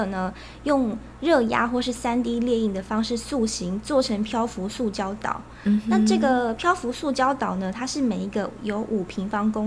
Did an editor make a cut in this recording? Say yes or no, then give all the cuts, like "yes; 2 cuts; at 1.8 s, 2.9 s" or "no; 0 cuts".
no; 0 cuts